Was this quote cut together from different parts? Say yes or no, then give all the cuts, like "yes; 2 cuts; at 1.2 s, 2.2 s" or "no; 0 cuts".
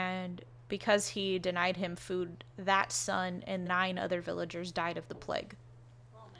yes; 2 cuts; at 2.5 s, 3.6 s